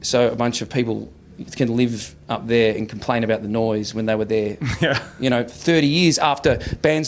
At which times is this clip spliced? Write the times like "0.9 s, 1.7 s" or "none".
none